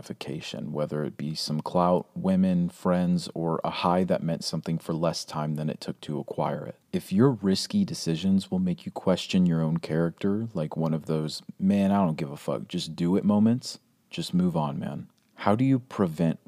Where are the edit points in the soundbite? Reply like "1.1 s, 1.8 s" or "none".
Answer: 6.8 s